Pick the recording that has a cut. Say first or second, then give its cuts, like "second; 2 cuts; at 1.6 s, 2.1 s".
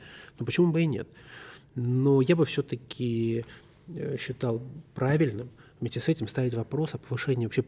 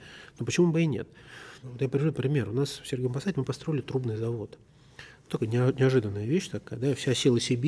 second; 1 cut; at 1.6 s